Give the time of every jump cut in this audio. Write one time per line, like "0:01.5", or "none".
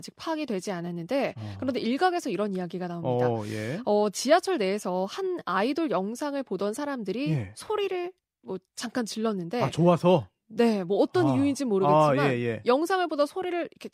none